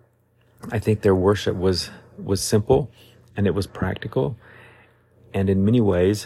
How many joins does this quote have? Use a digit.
0